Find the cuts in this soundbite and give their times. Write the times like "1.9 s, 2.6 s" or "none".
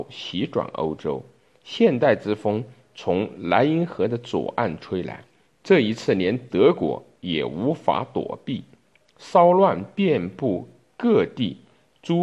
none